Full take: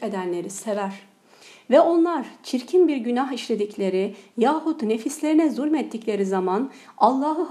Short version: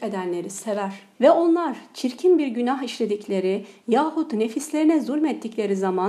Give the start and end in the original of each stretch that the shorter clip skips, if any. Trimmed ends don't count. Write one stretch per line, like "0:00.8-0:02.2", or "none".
0:01.1-0:01.6